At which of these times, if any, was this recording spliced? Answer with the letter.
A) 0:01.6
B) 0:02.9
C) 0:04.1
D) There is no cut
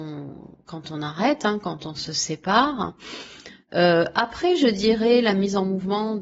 D